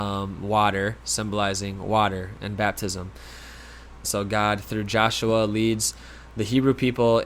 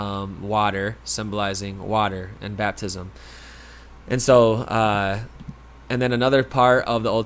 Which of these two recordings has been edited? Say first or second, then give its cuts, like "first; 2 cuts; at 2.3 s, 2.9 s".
first; 1 cut; at 4.0 s